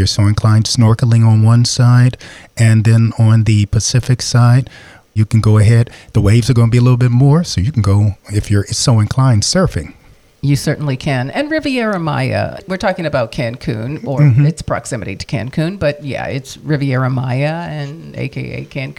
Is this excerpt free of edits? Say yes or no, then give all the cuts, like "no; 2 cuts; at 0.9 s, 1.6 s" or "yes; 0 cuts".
yes; 0 cuts